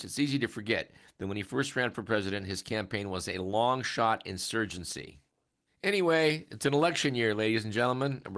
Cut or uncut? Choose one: uncut